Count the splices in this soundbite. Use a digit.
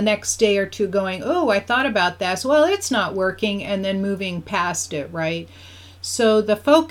0